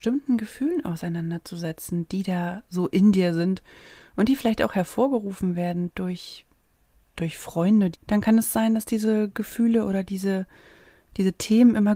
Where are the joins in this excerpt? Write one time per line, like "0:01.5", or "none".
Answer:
0:07.9